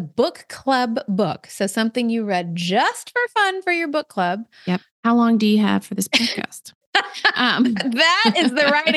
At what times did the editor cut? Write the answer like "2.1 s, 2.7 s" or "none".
4.9 s